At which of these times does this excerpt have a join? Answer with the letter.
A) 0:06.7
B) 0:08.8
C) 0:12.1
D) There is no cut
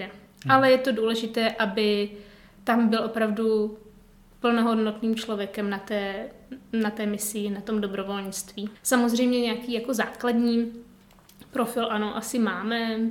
B